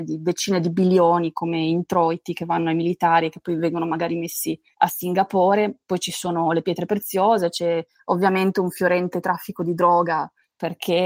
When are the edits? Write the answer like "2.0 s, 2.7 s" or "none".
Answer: none

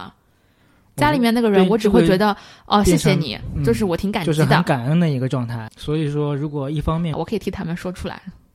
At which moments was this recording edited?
5.7 s, 7.1 s

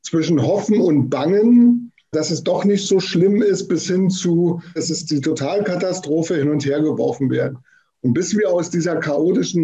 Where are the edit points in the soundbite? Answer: 2.1 s, 4.8 s

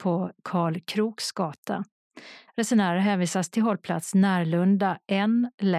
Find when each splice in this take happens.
2.5 s

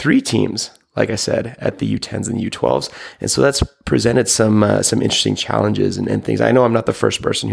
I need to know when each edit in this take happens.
none

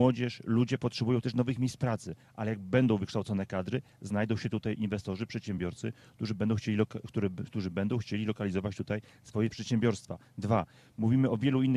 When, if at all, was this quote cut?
none

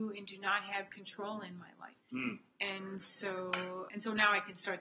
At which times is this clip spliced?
2.0 s, 3.9 s

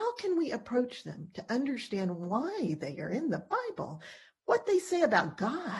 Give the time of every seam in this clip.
none

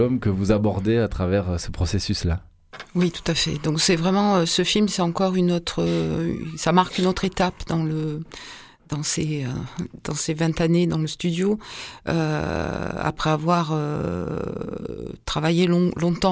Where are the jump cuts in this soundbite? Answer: none

